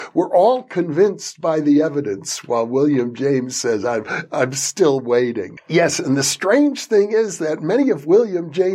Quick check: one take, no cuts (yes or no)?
no